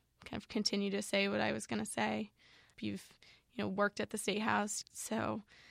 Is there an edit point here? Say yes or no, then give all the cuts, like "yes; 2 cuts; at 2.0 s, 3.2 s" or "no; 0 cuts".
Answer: yes; 2 cuts; at 2.7 s, 4.8 s